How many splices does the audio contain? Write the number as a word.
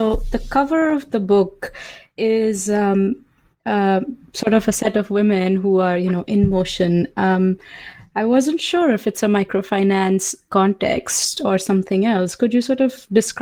zero